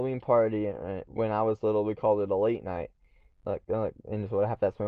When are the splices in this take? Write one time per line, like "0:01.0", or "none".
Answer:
0:03.3